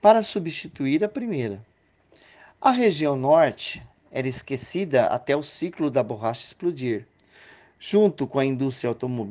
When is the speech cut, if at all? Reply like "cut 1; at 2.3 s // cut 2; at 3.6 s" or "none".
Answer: none